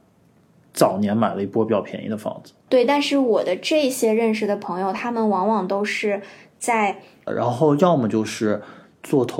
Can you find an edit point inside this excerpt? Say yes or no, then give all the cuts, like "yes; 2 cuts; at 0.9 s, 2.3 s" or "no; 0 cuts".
yes; 2 cuts; at 2.7 s, 7.3 s